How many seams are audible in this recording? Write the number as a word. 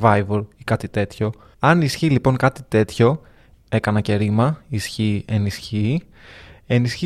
two